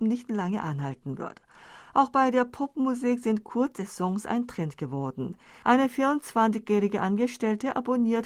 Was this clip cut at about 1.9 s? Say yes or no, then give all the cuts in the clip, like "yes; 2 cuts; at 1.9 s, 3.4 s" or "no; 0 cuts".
no; 1 cut; at 5.6 s